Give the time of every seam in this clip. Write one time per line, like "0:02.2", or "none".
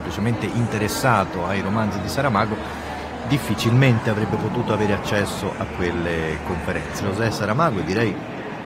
0:07.0